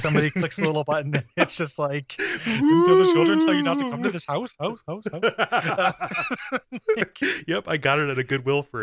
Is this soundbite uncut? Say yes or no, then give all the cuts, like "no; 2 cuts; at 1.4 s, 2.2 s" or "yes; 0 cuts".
yes; 0 cuts